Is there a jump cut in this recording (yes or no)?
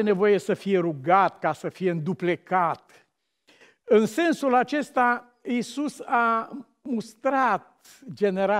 no